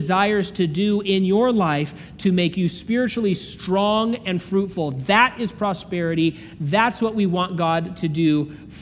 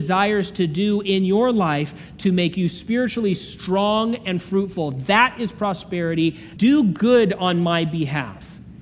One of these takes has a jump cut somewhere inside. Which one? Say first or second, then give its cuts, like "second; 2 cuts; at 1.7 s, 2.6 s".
second; 1 cut; at 6.6 s